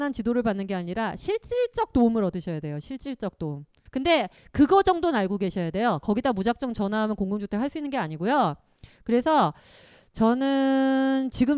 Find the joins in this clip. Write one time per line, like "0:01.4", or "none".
0:03.9
0:09.0